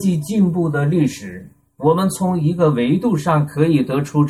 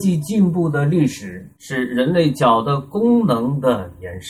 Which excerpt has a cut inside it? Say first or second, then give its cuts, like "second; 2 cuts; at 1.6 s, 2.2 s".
second; 1 cut; at 1.6 s